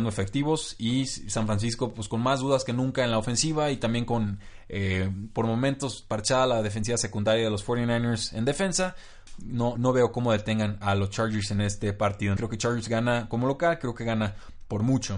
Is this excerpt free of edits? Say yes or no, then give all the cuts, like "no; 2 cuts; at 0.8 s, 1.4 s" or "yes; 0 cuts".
no; 2 cuts; at 9.8 s, 12.4 s